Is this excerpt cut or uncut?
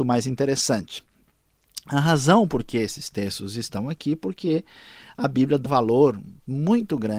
cut